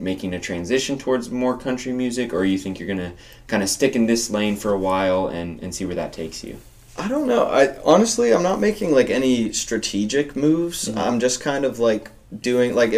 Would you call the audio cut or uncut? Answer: uncut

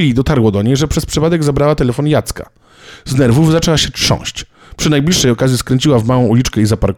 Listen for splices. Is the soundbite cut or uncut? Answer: uncut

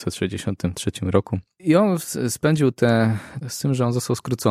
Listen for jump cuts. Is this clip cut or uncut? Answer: cut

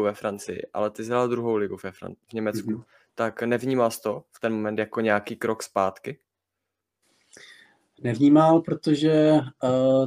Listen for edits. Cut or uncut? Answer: uncut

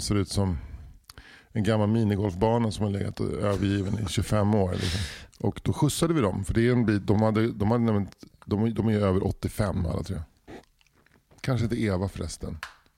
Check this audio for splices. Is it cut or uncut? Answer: cut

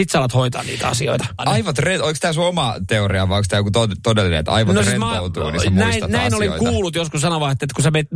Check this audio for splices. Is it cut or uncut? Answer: cut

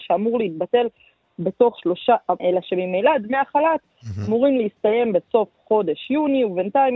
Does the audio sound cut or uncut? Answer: cut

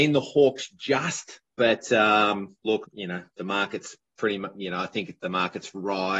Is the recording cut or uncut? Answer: cut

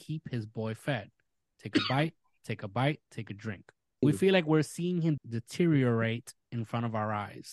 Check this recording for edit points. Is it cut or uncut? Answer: cut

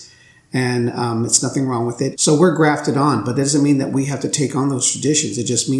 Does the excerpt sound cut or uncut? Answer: cut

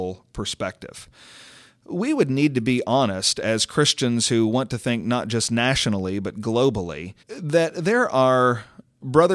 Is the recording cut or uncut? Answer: cut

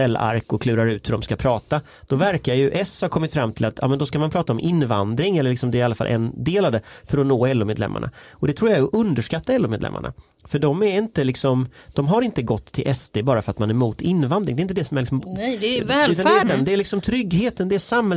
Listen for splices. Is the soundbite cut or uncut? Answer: cut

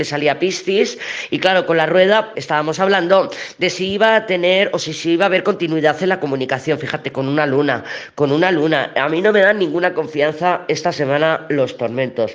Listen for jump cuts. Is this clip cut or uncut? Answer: cut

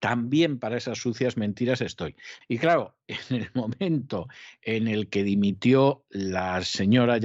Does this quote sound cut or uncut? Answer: cut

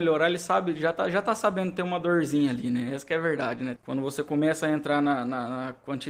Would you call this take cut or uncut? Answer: cut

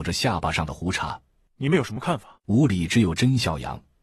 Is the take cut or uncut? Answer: cut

